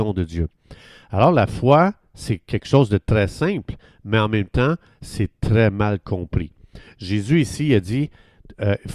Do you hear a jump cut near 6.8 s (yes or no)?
no